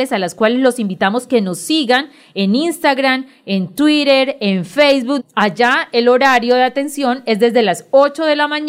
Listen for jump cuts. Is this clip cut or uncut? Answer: cut